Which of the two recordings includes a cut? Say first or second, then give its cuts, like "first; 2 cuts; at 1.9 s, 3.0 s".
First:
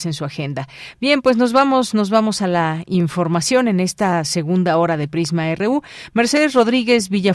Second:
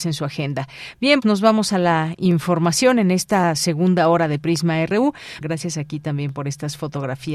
second; 2 cuts; at 1.2 s, 5.4 s